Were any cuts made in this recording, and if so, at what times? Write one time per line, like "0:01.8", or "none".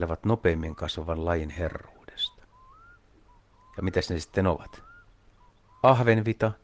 none